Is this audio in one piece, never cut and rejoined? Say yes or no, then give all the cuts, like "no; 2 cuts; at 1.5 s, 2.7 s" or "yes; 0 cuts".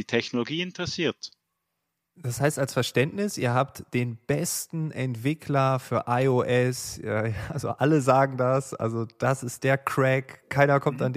yes; 0 cuts